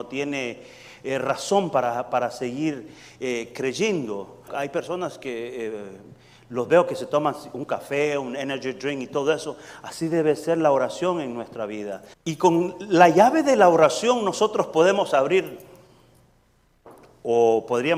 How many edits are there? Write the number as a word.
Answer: two